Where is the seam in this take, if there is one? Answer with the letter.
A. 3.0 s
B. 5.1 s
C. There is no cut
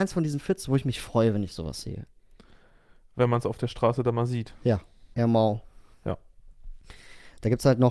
B